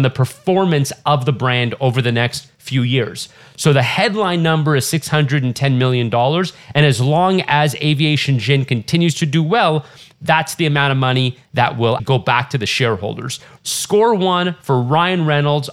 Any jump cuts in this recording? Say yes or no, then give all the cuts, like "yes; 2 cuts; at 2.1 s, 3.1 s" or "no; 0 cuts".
yes; 2 cuts; at 12.0 s, 13.6 s